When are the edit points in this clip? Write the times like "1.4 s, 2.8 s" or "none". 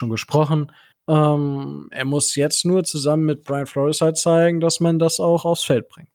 0.9 s